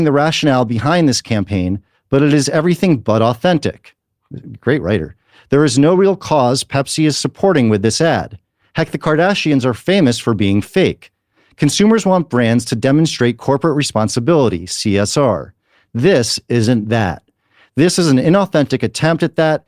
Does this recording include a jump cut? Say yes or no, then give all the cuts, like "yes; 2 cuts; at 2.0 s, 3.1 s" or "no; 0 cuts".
no; 0 cuts